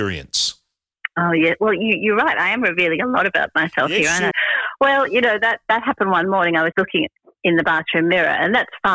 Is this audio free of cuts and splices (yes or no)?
no